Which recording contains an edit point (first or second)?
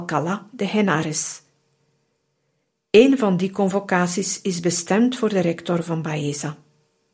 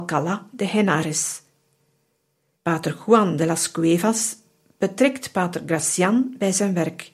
second